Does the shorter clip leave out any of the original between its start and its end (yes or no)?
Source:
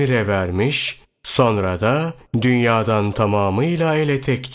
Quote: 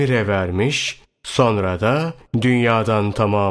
no